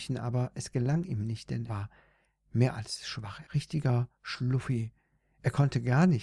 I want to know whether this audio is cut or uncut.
cut